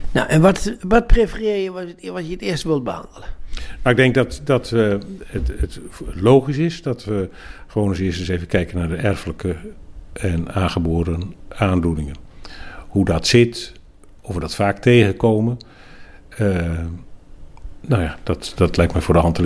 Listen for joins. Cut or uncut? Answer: uncut